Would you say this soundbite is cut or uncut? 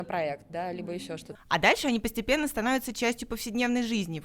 cut